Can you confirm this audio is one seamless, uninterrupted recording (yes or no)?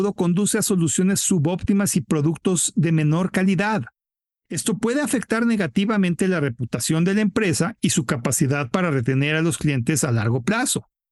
yes